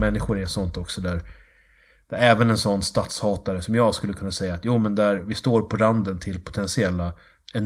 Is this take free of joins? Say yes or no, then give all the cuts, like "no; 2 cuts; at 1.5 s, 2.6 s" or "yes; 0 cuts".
no; 1 cut; at 5.2 s